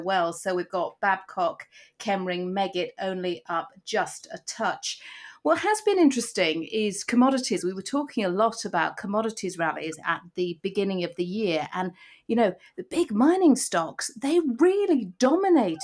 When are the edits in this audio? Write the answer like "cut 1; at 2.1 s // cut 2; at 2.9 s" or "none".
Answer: none